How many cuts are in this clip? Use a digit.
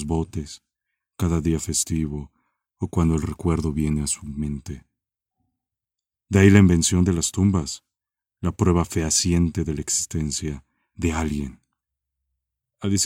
1